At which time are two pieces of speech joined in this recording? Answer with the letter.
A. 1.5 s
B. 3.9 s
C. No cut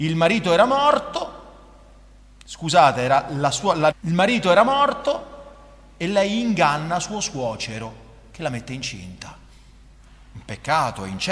B